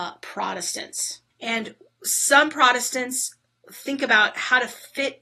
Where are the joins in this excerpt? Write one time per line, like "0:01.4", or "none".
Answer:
0:01.3